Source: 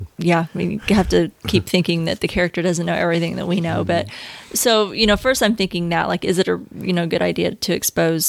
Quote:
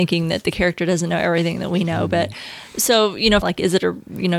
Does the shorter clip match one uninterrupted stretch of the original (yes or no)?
no